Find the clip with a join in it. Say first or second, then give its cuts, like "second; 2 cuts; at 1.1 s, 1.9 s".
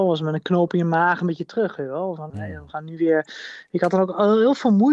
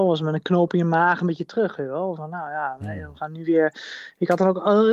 first; 1 cut; at 2.3 s